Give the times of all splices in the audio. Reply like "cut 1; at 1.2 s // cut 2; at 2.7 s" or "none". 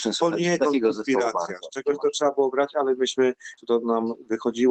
cut 1; at 3.6 s